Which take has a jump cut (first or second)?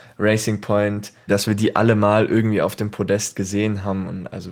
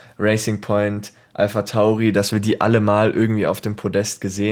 first